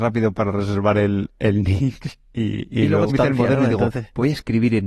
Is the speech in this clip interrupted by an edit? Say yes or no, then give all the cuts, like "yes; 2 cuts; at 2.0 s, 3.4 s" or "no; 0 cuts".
yes; 1 cut; at 3.1 s